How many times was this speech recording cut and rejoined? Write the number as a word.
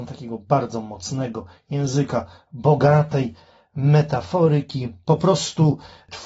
one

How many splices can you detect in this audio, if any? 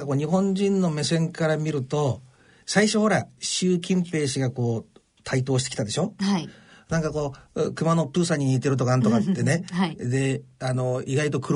zero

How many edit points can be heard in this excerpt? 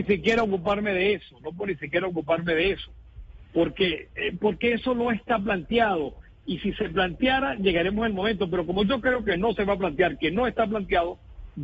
zero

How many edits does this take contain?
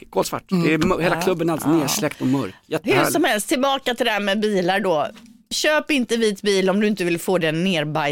zero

